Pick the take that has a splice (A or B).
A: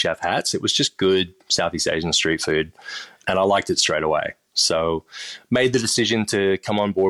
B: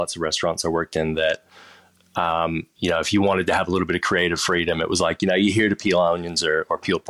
A